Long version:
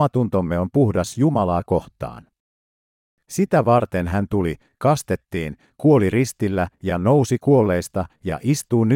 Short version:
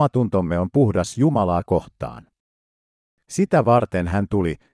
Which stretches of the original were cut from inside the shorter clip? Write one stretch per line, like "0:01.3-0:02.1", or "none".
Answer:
none